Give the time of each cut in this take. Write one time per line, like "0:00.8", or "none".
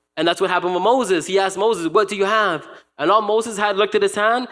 none